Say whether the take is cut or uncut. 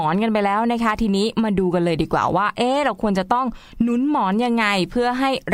uncut